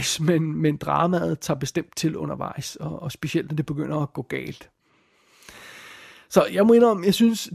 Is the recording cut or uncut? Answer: uncut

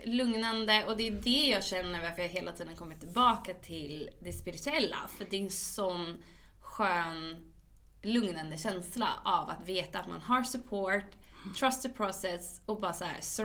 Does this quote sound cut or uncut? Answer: uncut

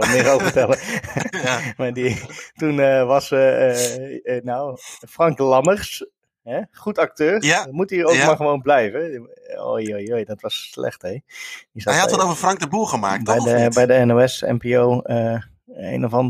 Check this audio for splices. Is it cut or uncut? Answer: uncut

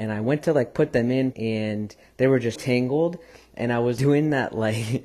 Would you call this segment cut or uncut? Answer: cut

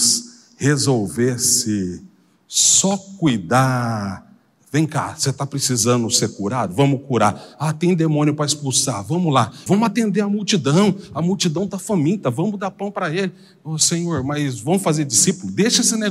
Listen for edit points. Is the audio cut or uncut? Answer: cut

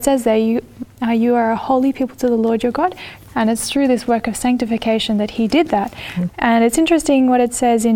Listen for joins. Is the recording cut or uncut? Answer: cut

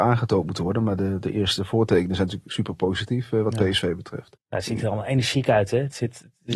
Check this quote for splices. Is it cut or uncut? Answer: uncut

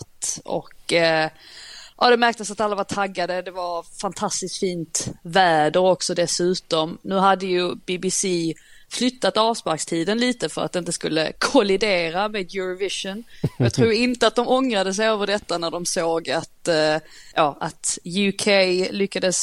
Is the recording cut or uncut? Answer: cut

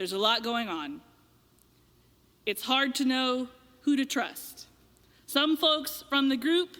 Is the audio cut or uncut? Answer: uncut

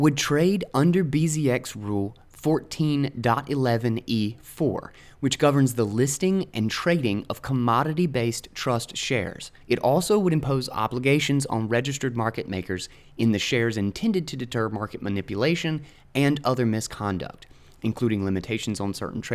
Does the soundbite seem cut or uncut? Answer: cut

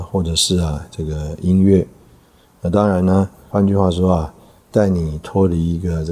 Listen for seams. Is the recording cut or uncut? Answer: cut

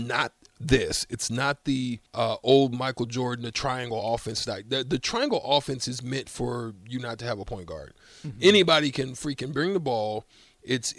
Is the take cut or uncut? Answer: cut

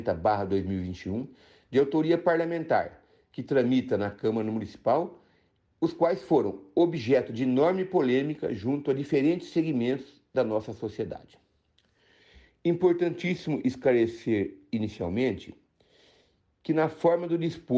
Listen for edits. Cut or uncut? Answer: uncut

